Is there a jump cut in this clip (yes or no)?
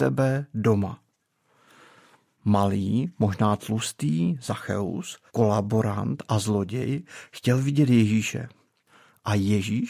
yes